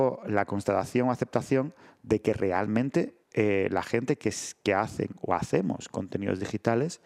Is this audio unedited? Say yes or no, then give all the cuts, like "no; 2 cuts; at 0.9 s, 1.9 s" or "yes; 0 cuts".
no; 1 cut; at 3.2 s